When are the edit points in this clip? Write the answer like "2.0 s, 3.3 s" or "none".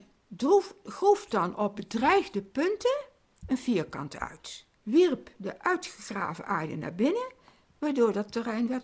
none